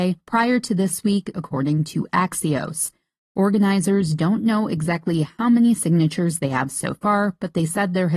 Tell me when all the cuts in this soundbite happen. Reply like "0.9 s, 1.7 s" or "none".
1.3 s